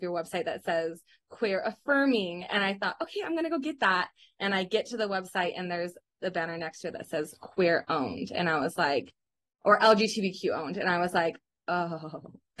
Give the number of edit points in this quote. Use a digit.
0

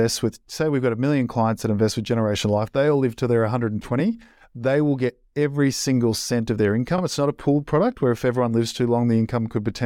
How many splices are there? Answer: 0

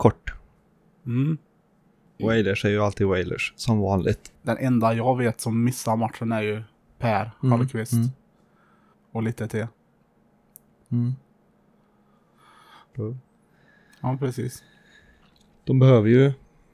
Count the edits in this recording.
3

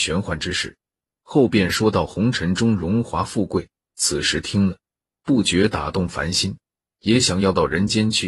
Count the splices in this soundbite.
0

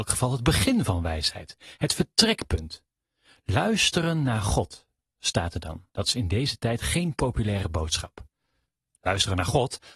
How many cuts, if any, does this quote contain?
1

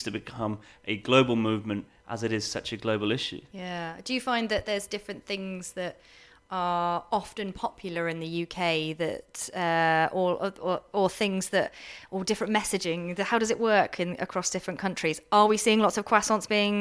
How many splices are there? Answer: 0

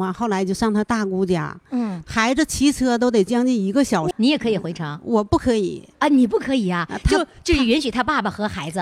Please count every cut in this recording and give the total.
2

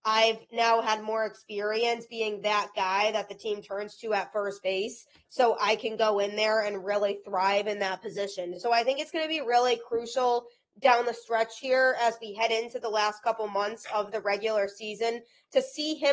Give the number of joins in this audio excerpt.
0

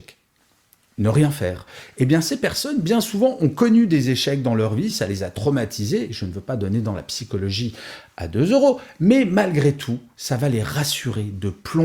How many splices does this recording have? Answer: 0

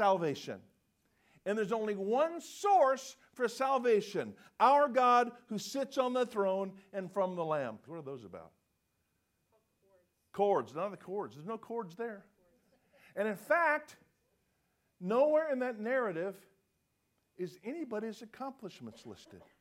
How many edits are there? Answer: 1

